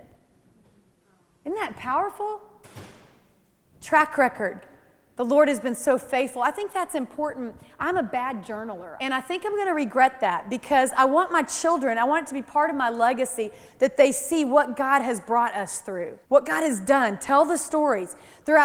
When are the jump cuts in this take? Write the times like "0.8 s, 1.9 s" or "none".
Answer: 9.0 s, 16.2 s

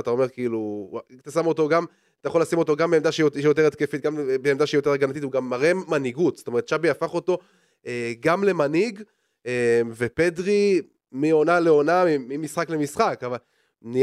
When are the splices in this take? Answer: none

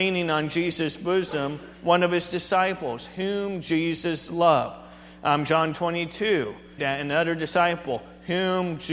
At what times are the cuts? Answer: 6.8 s

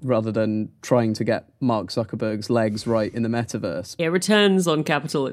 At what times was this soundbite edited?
4.0 s

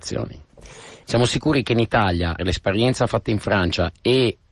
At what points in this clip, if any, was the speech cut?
1.0 s, 2.4 s

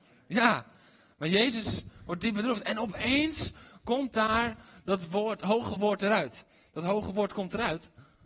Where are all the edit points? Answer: none

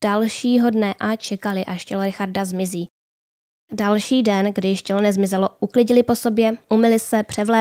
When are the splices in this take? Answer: 3.6 s

